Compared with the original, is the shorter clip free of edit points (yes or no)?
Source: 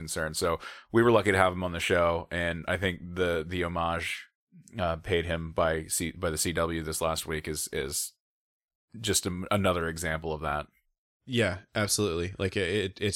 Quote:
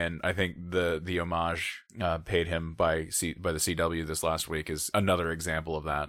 no